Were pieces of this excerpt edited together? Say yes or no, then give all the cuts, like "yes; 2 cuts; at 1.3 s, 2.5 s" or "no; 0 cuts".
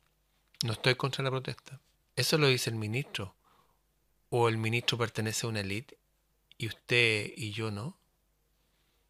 yes; 1 cut; at 2.0 s